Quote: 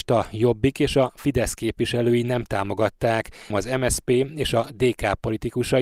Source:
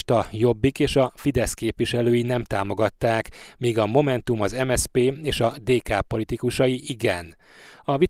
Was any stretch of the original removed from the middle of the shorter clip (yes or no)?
yes